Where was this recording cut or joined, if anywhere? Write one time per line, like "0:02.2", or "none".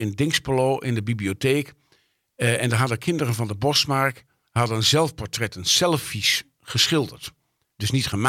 none